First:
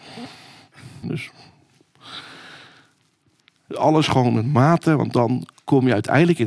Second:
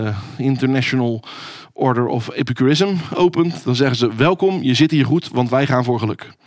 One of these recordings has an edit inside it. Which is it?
first; 2 cuts; at 1.0 s, 3.7 s

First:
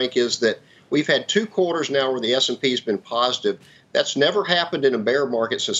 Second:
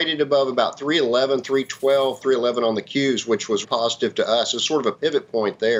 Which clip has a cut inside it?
second; 2 cuts; at 2.2 s, 3.6 s

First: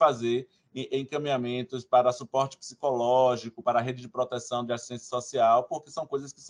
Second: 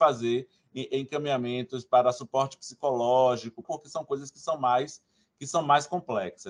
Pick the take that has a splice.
second; 1 cut; at 3.6 s

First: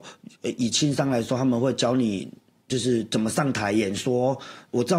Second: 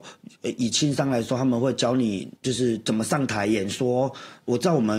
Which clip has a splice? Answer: second; 1 cut; at 2.4 s

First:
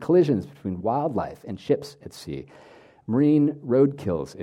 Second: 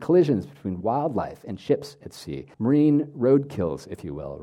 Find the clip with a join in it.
second; 1 cut; at 2.5 s

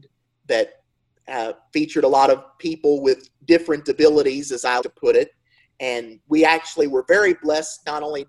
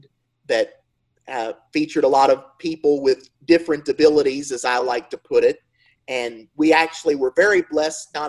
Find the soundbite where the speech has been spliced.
first; 1 cut; at 4.8 s

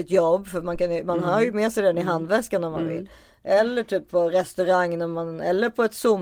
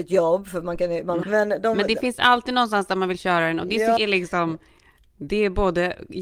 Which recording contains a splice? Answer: second; 2 cuts; at 1.2 s, 4.0 s

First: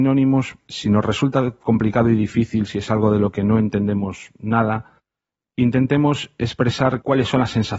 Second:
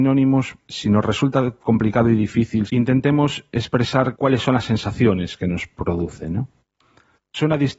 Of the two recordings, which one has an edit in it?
second; 1 cut; at 2.7 s

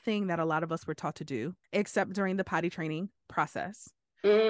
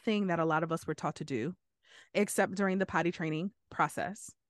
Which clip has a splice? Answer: first; 1 cut; at 1.6 s

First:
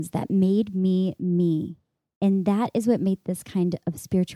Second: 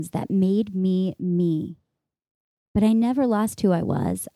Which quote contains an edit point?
first; 1 cut; at 2.1 s

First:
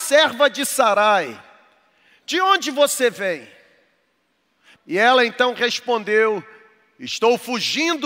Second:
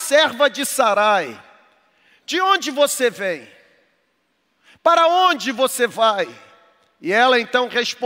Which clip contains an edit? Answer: first; 1 cut; at 4.7 s

